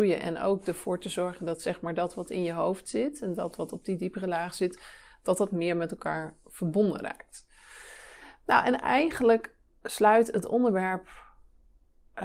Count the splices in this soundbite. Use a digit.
0